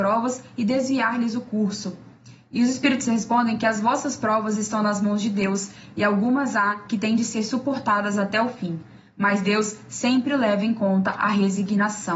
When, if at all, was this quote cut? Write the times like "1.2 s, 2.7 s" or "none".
none